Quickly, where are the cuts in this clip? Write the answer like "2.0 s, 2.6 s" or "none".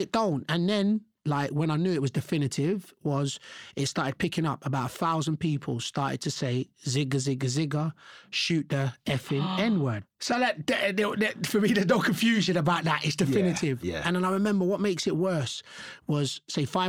none